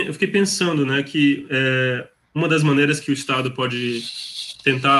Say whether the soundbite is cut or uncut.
uncut